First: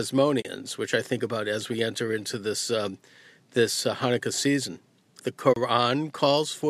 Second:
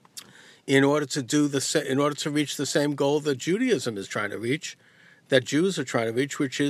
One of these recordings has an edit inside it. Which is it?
first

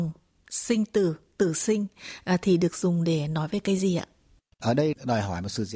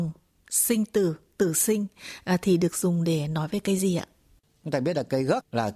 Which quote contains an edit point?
second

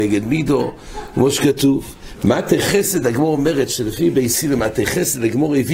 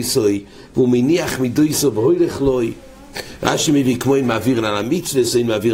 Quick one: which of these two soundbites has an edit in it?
first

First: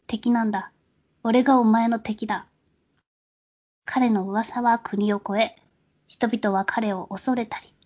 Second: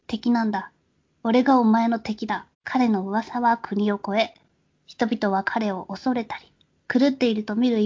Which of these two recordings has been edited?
second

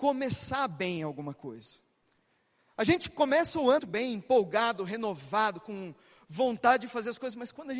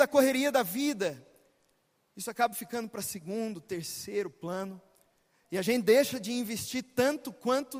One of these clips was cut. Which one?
first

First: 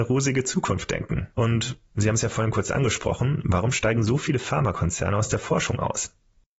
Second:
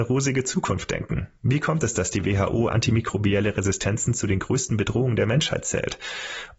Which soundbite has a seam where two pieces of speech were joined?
first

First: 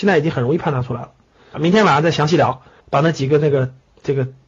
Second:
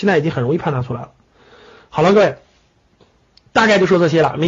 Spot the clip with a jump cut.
first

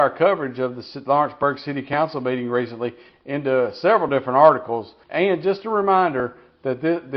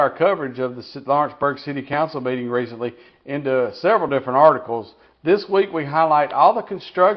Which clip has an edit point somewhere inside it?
first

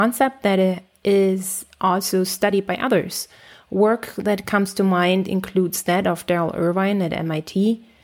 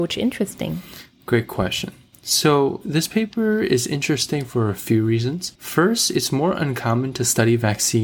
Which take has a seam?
second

